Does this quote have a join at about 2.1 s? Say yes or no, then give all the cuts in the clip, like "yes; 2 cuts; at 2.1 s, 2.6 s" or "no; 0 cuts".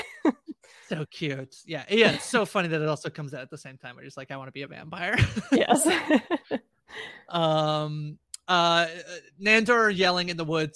no; 0 cuts